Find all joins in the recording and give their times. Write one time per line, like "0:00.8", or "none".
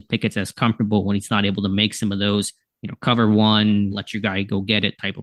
0:03.9